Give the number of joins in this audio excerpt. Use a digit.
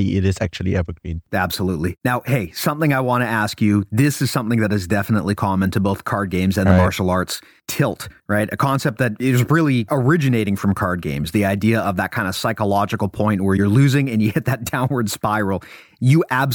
0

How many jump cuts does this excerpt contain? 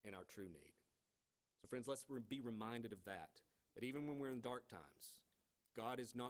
0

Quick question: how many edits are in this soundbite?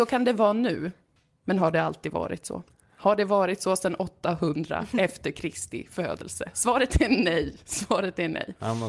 0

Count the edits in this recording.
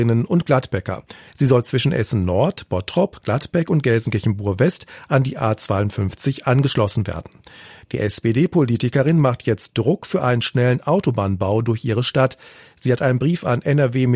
2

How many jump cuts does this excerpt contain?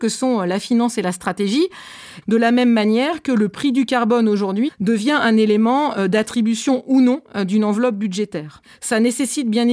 2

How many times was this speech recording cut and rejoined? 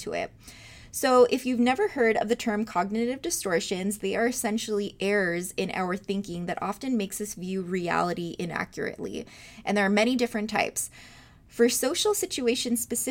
0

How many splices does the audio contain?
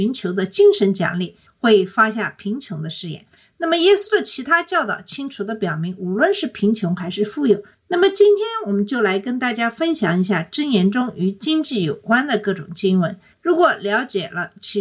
1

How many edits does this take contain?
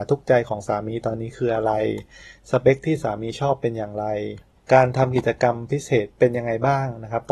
0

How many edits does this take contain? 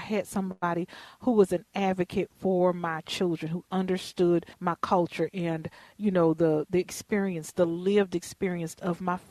1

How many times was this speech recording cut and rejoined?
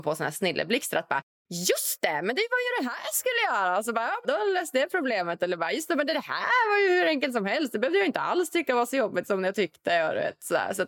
1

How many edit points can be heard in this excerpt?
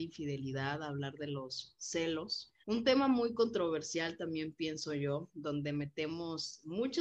1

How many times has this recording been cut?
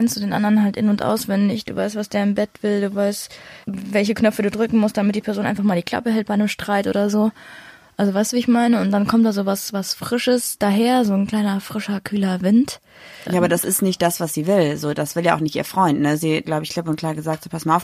3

